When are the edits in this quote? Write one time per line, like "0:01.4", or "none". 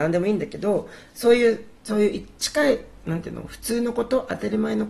0:01.8